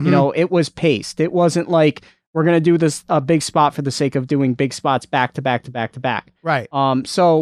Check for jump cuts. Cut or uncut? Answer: uncut